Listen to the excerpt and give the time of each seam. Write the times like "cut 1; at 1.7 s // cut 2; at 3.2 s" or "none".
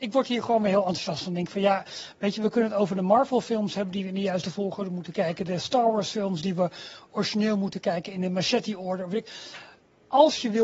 none